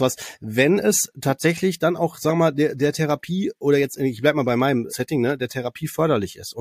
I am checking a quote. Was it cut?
yes; 1 cut; at 4.9 s

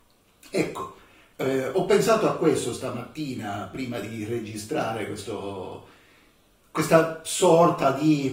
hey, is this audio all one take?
yes; 0 cuts

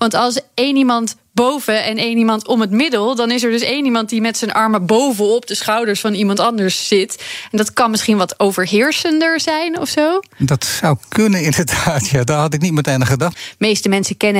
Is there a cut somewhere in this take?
yes; 1 cut; at 13.3 s

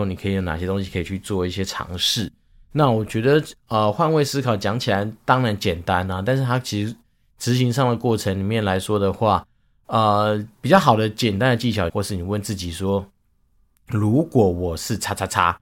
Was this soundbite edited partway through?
yes; 1 cut; at 11.9 s

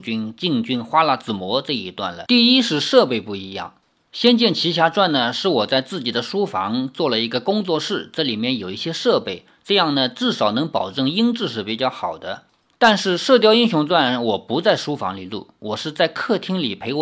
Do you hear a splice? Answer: yes; 1 cut; at 2.3 s

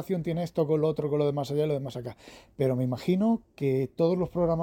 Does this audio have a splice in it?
no; 0 cuts

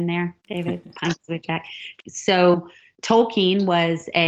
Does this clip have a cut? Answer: yes; 1 cut; at 2.0 s

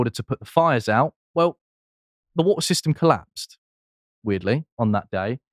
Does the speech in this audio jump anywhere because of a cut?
no; 0 cuts

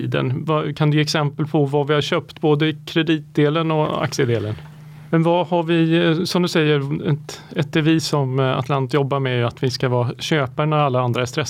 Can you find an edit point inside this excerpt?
yes; 1 cut; at 5.1 s

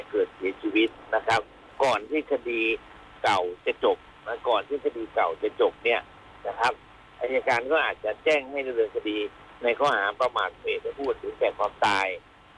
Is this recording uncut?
yes; 0 cuts

